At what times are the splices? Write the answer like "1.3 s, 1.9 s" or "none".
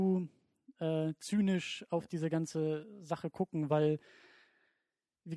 none